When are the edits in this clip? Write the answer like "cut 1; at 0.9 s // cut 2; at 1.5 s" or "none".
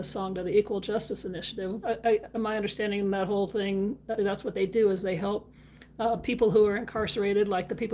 cut 1; at 1.8 s // cut 2; at 4.2 s